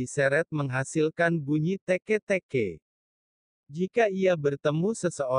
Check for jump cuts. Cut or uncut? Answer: uncut